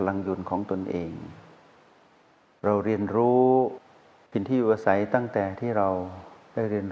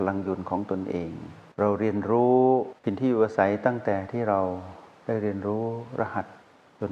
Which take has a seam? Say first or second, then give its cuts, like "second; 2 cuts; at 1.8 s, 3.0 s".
second; 2 cuts; at 1.5 s, 2.8 s